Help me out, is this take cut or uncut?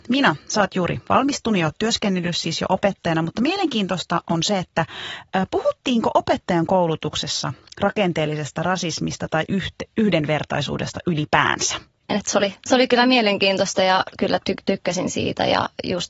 cut